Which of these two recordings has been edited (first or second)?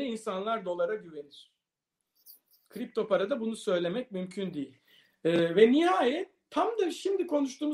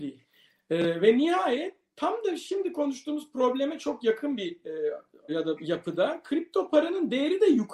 second